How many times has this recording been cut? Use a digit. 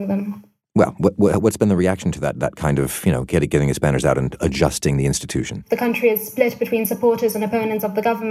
1